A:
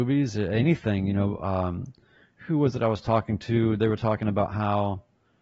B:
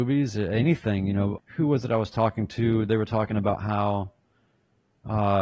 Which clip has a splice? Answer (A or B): B